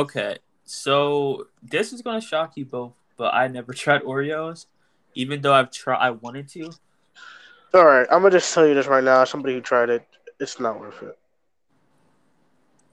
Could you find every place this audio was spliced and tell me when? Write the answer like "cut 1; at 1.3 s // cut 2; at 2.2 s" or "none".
cut 1; at 7.7 s